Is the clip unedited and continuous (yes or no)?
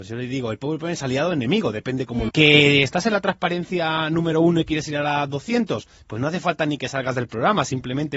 no